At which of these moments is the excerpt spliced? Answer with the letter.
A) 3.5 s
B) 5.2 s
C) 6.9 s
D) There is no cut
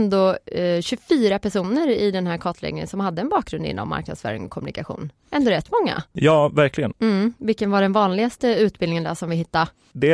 C